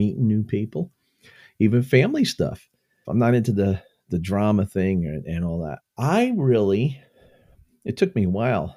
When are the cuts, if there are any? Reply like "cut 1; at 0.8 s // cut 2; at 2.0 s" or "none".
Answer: cut 1; at 3.0 s // cut 2; at 5.8 s